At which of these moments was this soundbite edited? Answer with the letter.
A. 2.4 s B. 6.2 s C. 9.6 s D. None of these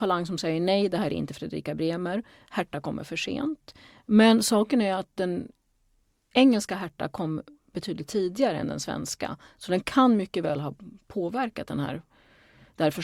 D